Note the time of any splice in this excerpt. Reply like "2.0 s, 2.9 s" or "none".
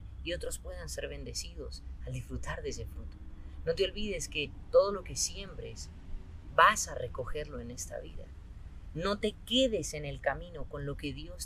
none